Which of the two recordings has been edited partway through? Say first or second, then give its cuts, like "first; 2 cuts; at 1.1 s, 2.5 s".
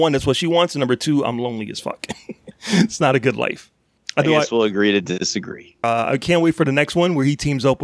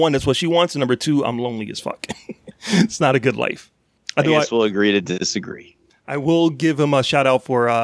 first; 1 cut; at 5.8 s